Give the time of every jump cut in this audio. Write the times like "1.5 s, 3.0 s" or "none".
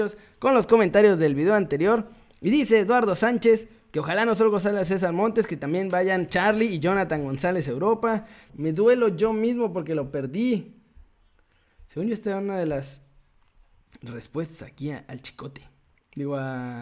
8.5 s